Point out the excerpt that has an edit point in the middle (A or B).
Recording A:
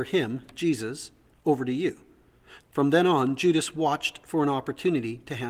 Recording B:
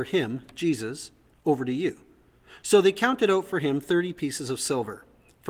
A